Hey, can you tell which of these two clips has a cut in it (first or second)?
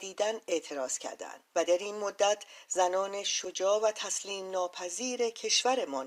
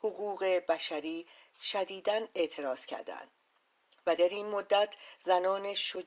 first